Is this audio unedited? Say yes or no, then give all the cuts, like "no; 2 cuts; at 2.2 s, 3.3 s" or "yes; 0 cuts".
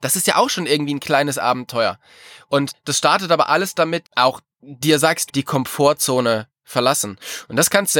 no; 2 cuts; at 4.0 s, 5.3 s